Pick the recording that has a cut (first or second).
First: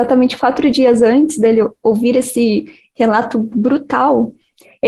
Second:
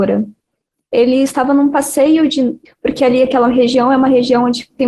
second